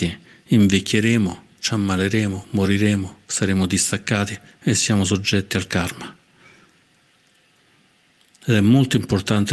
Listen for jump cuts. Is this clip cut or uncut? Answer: uncut